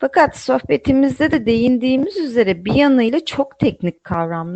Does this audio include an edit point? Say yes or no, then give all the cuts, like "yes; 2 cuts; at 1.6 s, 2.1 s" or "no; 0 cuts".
no; 0 cuts